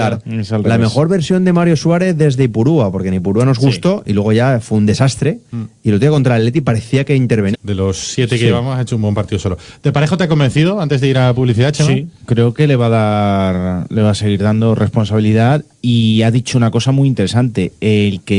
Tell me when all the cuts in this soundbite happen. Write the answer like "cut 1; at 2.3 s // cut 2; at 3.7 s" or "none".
cut 1; at 7.5 s